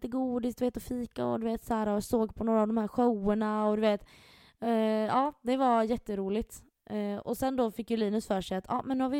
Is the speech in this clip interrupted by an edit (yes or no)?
no